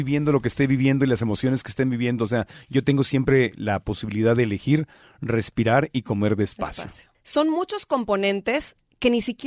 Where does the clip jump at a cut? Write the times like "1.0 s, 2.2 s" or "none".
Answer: 7.1 s